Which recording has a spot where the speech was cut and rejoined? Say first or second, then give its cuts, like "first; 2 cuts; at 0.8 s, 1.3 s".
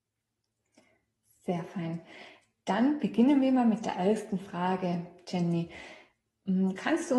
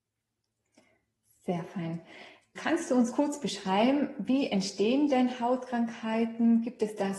second; 1 cut; at 2.6 s